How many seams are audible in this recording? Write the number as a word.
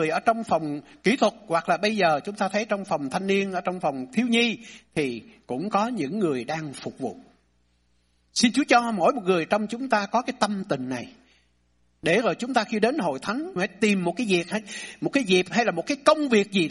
one